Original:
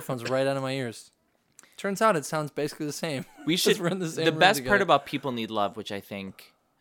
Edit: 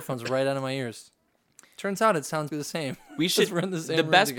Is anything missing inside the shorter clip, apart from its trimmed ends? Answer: yes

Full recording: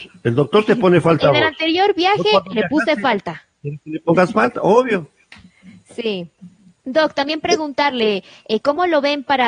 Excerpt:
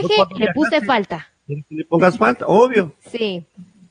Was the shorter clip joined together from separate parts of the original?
yes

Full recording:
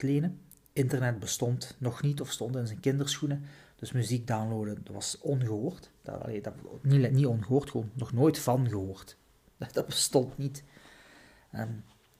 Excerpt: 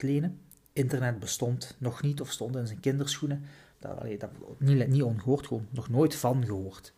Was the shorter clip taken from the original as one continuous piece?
no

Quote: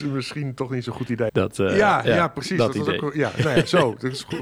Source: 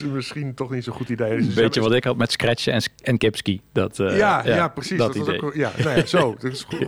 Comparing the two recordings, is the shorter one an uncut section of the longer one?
no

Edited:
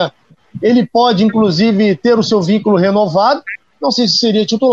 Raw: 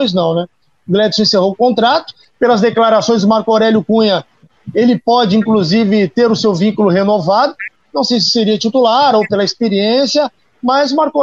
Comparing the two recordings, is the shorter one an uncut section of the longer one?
yes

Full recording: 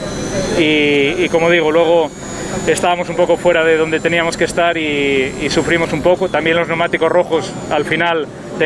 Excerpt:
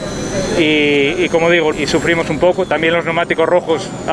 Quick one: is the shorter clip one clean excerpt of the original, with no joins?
no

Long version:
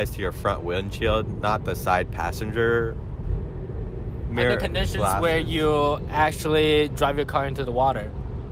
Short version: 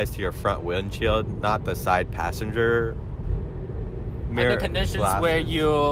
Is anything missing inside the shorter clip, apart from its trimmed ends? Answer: no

